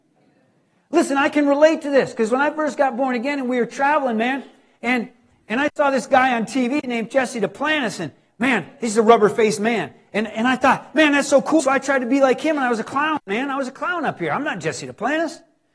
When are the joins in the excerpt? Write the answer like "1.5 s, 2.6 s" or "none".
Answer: 11.6 s